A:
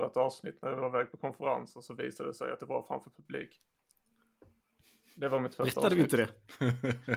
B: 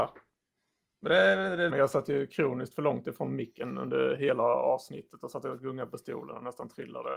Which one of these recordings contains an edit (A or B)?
B